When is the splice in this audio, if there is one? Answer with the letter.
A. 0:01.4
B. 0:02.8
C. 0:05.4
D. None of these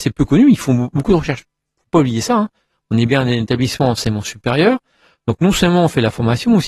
A